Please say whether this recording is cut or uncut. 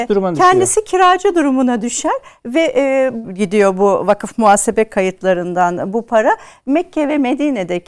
cut